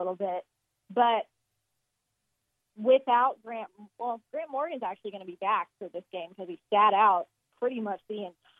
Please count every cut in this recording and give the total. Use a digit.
0